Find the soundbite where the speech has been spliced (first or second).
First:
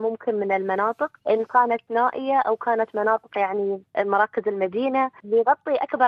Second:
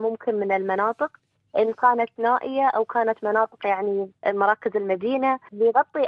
first